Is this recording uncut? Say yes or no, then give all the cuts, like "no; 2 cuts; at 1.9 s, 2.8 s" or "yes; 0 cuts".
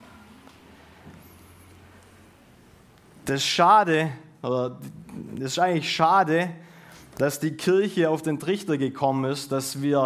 yes; 0 cuts